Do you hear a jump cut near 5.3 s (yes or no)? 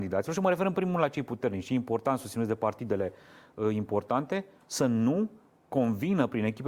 no